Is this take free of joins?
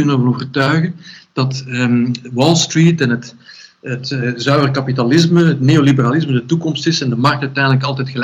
yes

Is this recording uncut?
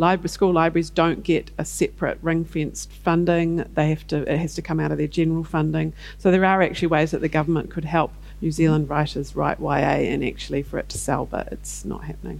yes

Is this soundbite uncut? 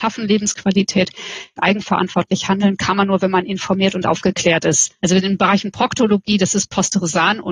no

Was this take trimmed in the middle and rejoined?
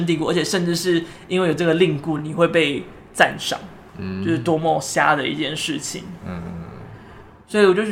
no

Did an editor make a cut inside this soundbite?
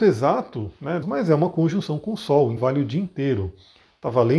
yes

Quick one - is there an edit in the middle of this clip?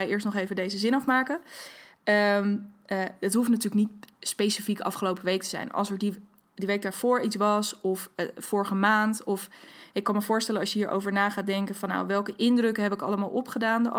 no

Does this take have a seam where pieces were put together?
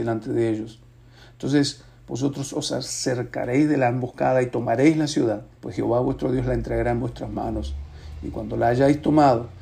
yes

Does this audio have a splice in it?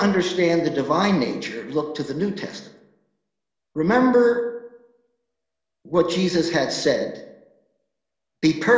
yes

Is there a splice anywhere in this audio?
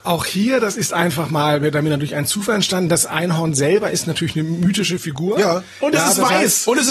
no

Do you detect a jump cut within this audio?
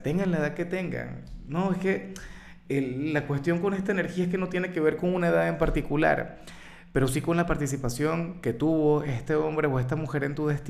no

